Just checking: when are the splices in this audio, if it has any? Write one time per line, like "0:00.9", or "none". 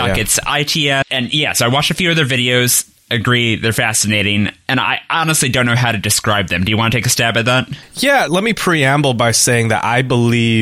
0:01.0
0:08.3